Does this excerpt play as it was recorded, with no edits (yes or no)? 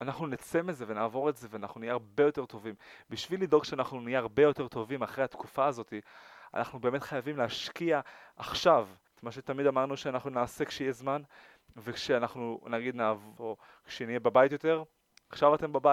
no